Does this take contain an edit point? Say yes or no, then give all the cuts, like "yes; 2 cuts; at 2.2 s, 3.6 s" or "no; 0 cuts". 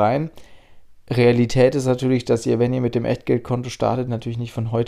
no; 0 cuts